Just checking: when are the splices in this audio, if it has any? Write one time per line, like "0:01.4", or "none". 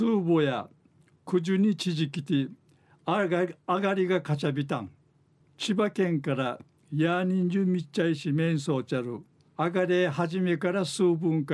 0:05.4
0:09.5